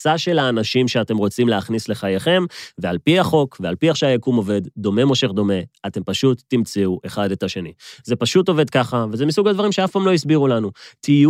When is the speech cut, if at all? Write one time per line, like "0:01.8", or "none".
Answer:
none